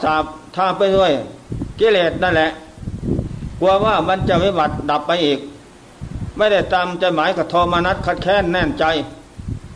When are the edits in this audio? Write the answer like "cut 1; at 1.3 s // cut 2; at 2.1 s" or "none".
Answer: none